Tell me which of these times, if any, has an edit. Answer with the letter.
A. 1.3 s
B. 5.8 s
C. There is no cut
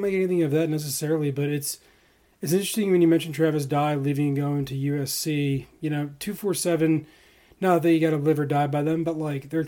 C